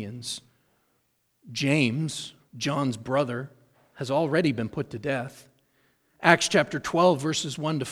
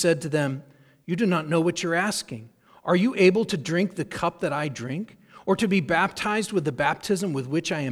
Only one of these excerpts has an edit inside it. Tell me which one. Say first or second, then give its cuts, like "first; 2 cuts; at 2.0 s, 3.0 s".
first; 1 cut; at 2.4 s